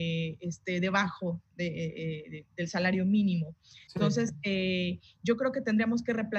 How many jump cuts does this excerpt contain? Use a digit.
1